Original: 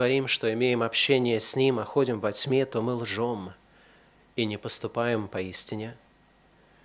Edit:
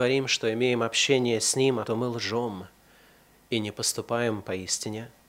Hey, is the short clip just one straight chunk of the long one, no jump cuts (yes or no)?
no